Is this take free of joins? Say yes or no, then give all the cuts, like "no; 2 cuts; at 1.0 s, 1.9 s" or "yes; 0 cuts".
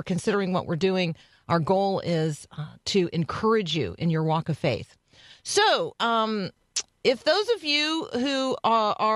yes; 0 cuts